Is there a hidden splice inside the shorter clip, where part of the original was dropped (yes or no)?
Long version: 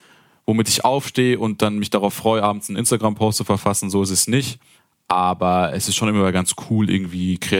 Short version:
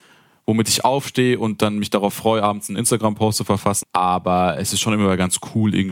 yes